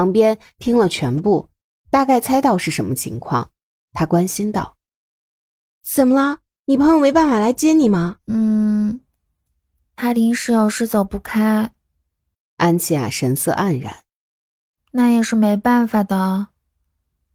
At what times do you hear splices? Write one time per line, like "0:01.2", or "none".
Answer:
none